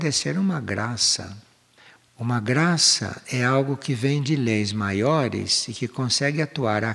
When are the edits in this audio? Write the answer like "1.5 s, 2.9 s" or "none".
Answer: 2.0 s